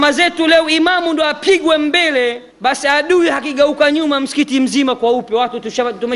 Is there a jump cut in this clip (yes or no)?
yes